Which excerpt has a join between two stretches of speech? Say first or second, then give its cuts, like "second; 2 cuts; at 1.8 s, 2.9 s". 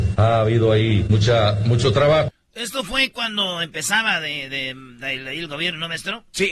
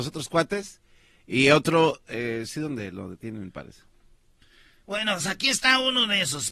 first; 1 cut; at 4.5 s